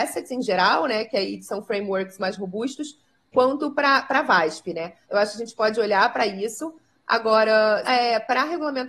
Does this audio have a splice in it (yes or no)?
yes